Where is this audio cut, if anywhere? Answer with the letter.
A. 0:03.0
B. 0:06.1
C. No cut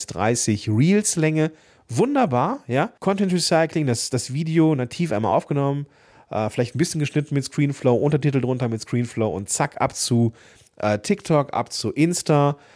A